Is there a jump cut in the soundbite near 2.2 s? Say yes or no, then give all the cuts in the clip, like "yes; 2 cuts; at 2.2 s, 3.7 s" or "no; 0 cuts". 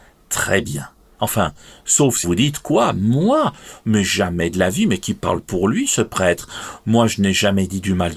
yes; 1 cut; at 2.2 s